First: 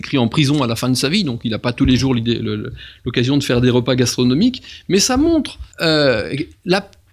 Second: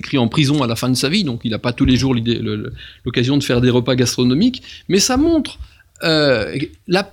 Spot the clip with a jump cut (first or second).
first